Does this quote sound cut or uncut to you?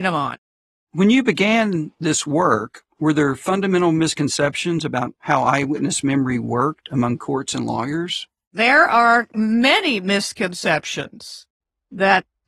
uncut